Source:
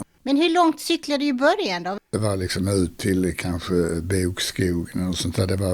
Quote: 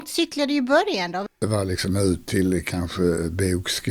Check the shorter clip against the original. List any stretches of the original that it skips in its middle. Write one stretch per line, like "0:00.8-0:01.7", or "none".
none